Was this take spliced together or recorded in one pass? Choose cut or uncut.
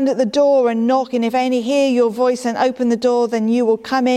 uncut